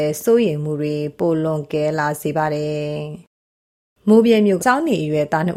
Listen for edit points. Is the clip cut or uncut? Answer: cut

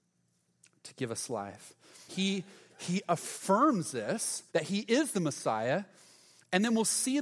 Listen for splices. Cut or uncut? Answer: cut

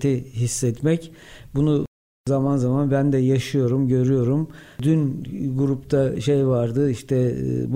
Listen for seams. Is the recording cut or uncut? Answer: uncut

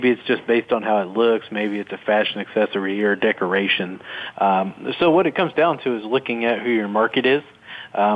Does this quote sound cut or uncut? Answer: cut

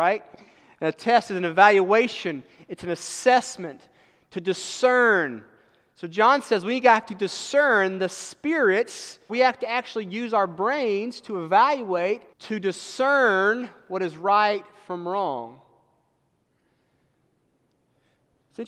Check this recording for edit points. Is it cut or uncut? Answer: cut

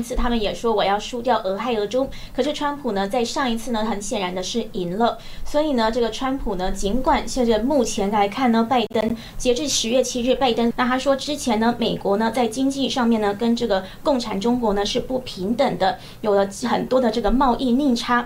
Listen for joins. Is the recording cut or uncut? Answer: cut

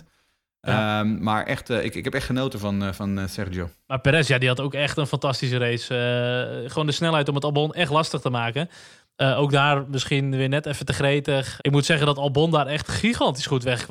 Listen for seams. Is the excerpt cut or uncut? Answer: cut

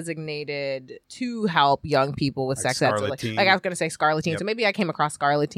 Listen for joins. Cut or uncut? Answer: cut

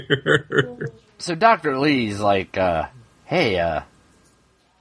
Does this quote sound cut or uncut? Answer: uncut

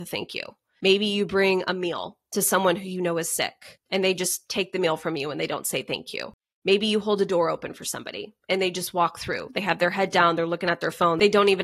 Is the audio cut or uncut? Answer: uncut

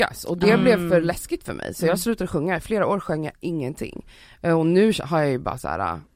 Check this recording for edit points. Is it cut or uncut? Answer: uncut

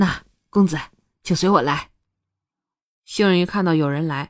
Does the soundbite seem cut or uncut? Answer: cut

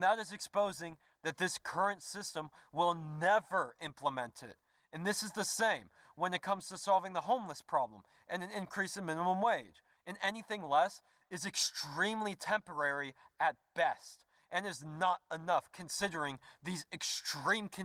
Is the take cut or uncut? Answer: cut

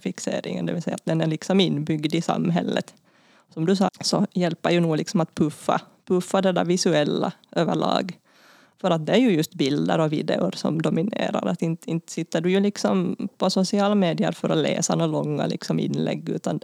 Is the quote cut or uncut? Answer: cut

